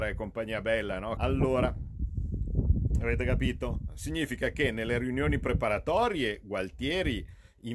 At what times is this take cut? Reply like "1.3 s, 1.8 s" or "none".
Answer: 1.2 s